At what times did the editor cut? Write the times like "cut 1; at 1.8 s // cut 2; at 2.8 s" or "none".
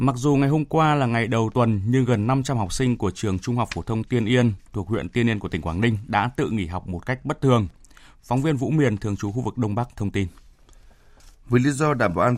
none